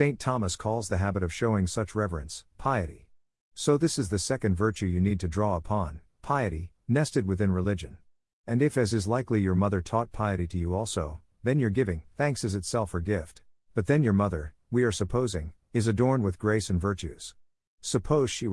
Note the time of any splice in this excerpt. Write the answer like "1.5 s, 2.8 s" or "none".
13.6 s